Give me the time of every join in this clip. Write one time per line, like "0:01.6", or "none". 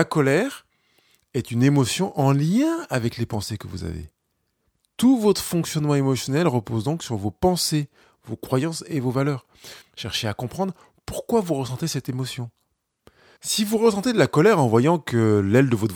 0:09.8
0:13.4